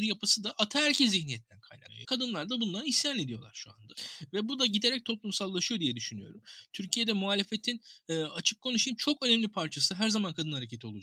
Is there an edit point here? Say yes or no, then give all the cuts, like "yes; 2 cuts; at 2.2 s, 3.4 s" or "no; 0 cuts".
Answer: yes; 1 cut; at 2.0 s